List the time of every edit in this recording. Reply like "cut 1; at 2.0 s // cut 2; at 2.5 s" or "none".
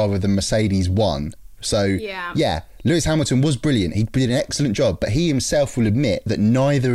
none